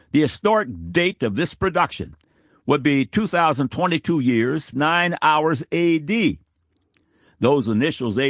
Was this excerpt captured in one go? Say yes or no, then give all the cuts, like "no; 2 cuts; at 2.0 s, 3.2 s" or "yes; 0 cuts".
no; 1 cut; at 4.7 s